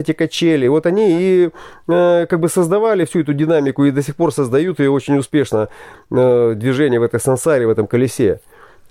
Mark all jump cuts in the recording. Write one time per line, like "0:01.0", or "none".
none